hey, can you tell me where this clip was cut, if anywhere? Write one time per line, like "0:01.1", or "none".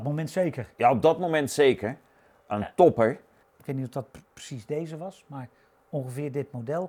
0:03.4